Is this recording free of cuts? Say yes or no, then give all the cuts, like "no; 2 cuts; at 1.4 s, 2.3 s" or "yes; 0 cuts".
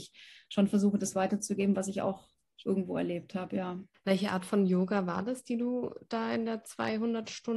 yes; 0 cuts